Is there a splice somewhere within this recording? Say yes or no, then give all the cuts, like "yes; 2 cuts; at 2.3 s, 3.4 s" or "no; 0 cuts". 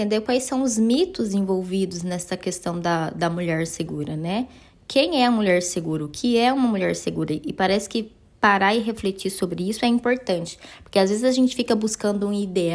no; 0 cuts